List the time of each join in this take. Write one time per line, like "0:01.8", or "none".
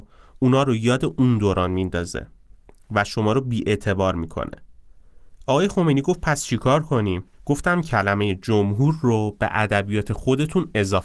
0:07.3